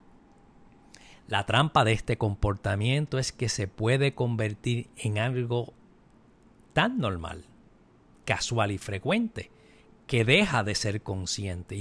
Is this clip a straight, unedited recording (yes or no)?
yes